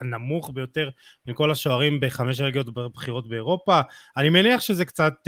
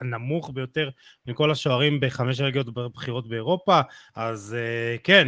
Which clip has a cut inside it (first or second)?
second